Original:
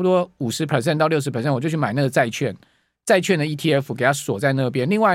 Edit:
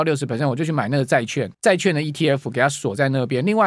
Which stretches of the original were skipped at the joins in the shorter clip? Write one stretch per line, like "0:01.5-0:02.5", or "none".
0:02.6-0:03.0